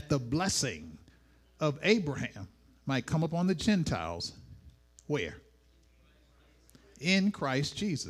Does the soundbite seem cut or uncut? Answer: uncut